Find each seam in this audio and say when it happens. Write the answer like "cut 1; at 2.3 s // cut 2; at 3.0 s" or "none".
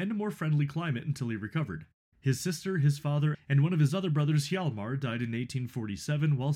cut 1; at 2.1 s // cut 2; at 3.3 s

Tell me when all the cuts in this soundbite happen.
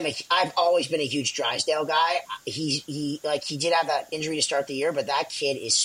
none

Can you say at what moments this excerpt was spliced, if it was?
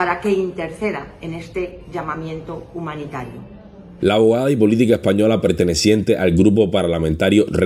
cut 1; at 4.0 s

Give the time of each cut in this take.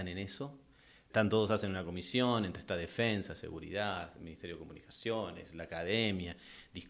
cut 1; at 1.1 s

